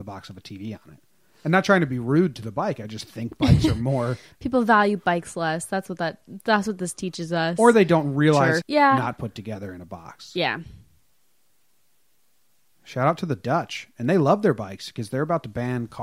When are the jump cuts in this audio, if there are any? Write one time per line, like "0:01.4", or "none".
0:08.6